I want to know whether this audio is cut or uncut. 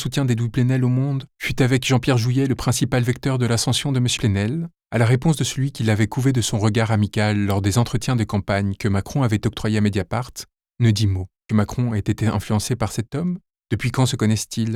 cut